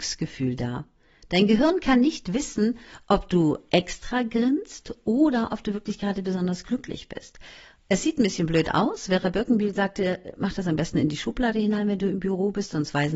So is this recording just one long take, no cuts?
yes; 0 cuts

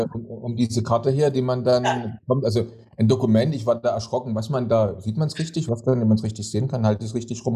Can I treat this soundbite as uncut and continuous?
yes; 0 cuts

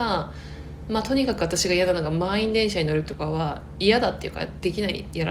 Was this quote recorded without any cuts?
yes; 0 cuts

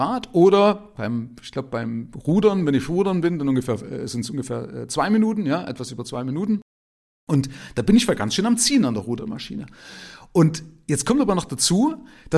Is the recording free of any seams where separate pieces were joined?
yes; 0 cuts

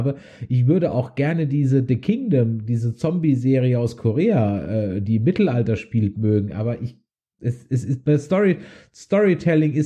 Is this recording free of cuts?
yes; 0 cuts

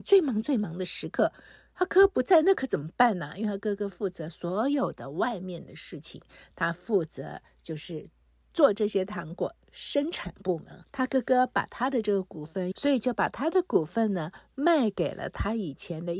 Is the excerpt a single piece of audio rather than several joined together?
no; 2 cuts; at 10.8 s, 12.7 s

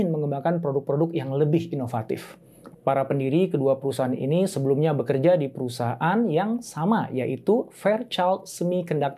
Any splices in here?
yes; 1 cut; at 2.7 s

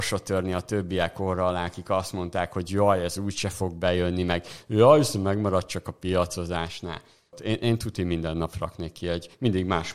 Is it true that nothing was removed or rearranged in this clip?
no; 1 cut; at 7.3 s

